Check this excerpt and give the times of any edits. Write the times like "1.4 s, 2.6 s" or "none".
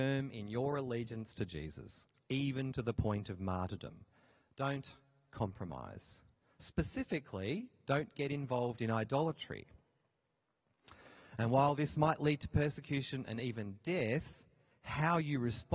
none